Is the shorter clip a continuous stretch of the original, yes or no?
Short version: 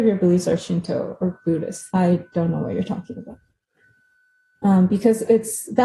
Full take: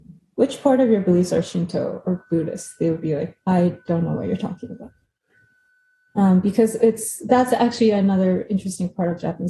no